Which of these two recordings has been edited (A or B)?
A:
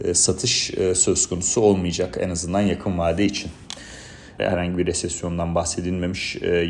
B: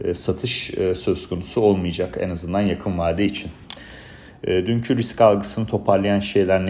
A